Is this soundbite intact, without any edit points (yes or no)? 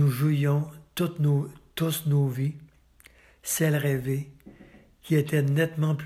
yes